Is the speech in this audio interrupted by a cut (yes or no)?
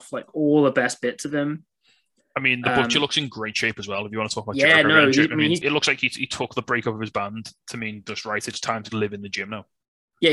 yes